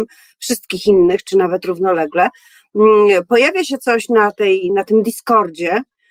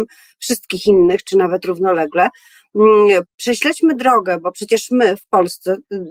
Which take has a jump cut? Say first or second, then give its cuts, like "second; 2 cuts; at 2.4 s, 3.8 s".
second; 1 cut; at 3.2 s